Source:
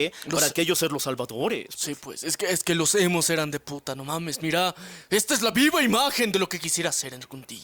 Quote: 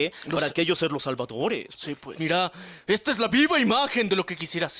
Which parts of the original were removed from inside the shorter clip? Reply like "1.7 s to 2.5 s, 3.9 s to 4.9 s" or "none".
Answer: 2.1 s to 4.4 s

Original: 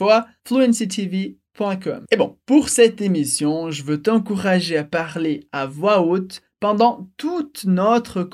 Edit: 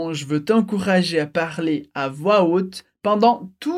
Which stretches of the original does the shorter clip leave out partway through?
none

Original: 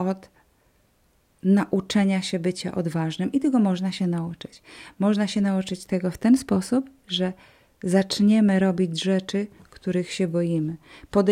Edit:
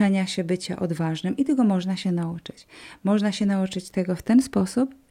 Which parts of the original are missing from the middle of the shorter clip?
none

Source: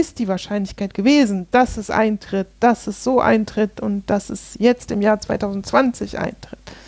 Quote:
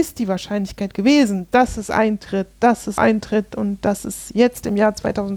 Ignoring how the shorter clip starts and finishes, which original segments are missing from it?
3.0 s to 3.2 s

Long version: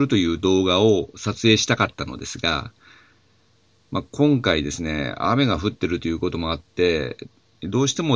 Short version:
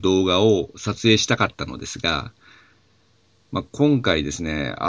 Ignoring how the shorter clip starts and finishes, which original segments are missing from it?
none

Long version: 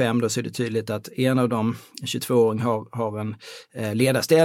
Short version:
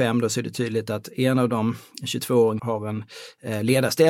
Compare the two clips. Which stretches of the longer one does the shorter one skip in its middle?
2.6 s to 2.9 s

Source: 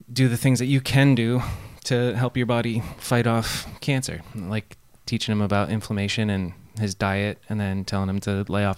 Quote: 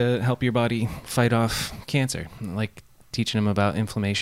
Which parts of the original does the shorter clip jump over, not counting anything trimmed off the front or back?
none

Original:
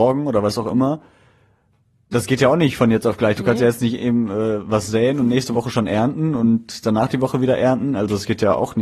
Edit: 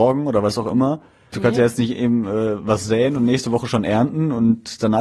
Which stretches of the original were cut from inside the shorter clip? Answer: 1.3 s to 3.4 s

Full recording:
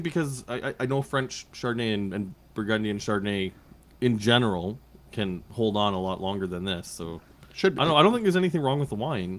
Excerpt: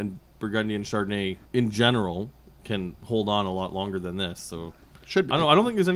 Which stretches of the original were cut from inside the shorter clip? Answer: 3.6 s to 3.9 s

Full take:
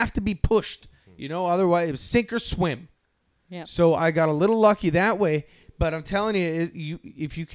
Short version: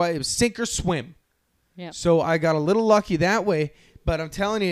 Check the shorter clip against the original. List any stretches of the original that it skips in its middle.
none

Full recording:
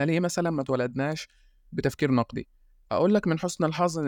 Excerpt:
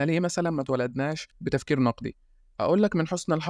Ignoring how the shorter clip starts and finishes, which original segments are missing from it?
1.3 s to 1.6 s

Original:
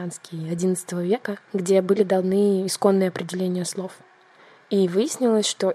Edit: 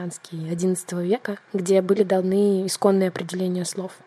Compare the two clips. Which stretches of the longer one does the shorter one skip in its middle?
none

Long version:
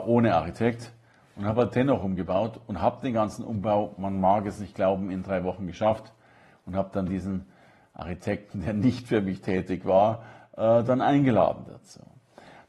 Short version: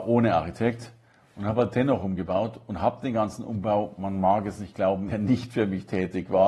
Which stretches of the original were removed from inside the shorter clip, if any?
5.1 s to 8.6 s

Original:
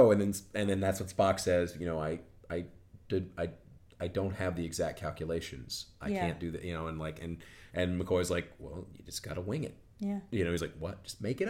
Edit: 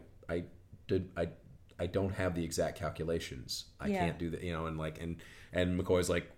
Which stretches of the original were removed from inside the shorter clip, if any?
none

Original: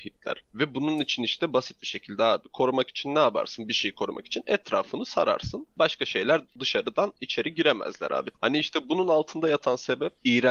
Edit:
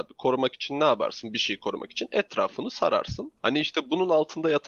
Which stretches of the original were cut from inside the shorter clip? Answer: 5.7 s to 8.4 s

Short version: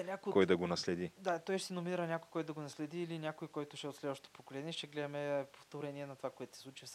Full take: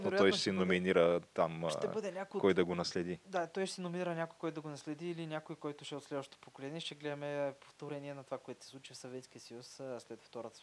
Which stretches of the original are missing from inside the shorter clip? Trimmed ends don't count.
none

